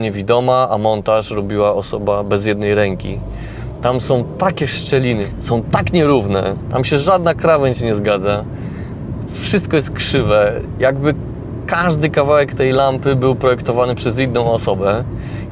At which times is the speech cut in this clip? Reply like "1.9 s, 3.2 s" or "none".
none